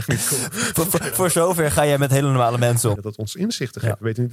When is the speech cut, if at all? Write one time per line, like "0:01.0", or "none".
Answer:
0:01.1
0:03.0